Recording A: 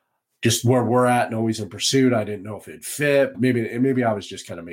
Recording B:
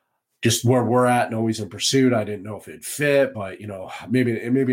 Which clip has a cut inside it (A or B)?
A